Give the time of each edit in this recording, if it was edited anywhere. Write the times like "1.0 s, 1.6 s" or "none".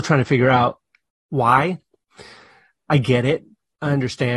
none